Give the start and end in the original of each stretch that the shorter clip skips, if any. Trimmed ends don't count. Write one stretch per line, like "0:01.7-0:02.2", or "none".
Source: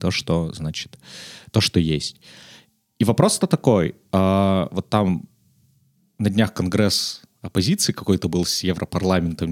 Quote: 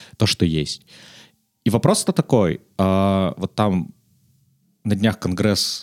none